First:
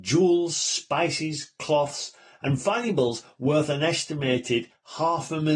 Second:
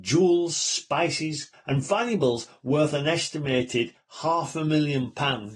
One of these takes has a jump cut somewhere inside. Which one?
second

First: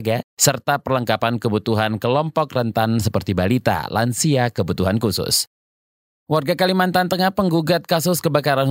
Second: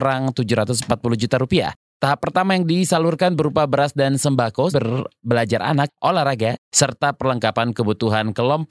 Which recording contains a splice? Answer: second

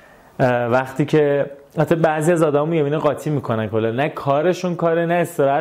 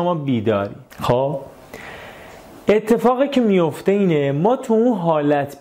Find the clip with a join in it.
second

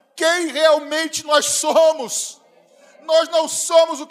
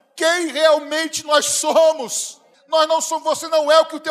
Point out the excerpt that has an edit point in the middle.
second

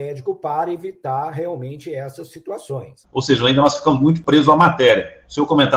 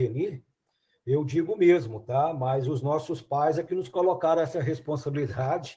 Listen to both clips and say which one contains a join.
first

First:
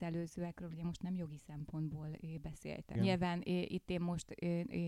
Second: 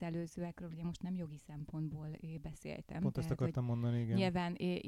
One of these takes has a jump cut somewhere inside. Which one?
first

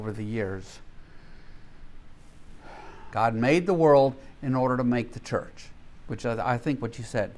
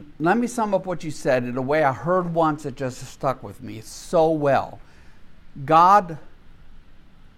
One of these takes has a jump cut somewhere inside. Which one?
first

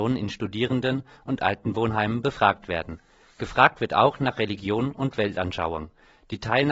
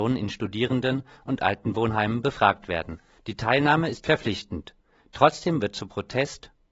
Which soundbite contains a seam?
second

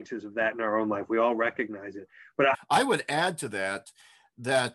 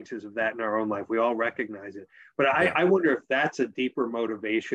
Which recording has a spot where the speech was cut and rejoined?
first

